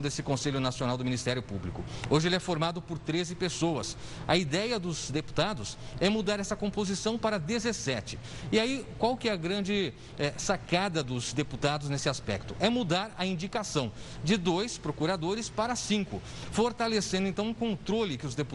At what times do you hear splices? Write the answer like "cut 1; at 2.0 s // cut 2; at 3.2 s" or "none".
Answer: none